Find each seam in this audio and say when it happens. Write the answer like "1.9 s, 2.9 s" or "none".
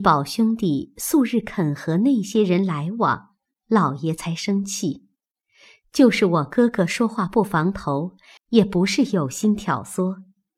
8.4 s